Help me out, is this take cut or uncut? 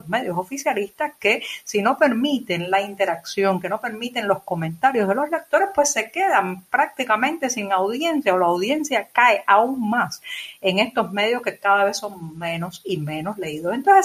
uncut